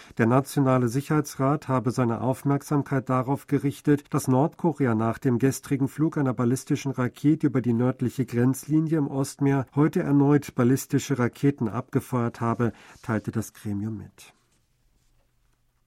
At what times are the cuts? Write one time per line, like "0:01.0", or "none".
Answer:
0:04.1
0:09.7